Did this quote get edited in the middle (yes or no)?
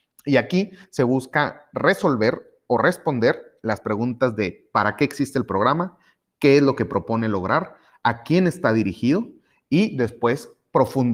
no